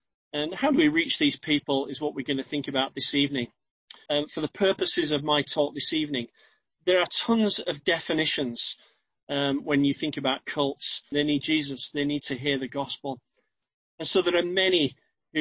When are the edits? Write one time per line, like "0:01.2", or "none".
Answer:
0:04.1
0:11.1